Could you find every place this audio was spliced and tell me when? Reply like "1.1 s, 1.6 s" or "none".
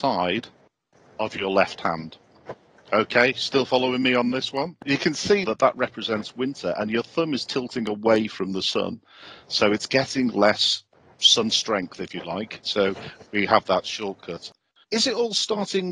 5.4 s, 12.6 s, 14.8 s